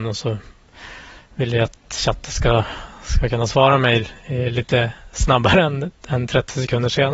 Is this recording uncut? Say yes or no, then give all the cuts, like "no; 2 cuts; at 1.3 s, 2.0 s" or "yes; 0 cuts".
yes; 0 cuts